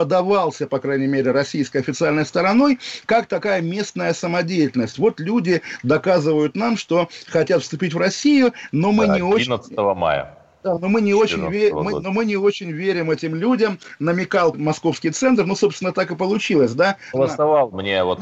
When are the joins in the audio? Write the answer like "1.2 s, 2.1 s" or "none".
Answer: 14.5 s, 17.1 s